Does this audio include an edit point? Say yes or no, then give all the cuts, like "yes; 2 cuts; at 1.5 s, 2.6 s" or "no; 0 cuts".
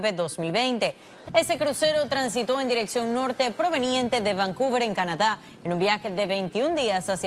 yes; 1 cut; at 1.2 s